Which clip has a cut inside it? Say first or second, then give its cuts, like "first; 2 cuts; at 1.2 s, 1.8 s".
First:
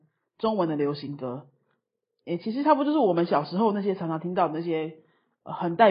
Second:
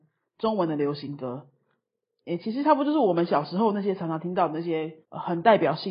second; 1 cut; at 5.0 s